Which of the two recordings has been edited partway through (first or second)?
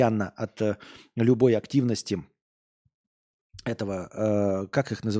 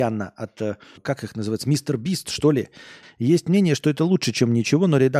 second